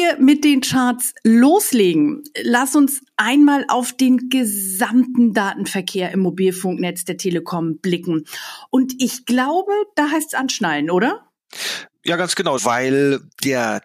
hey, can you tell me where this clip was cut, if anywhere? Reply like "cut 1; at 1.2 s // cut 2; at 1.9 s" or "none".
cut 1; at 12.6 s